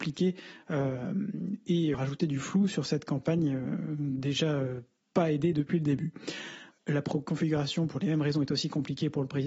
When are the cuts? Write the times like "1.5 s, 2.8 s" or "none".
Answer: 1.9 s, 6.7 s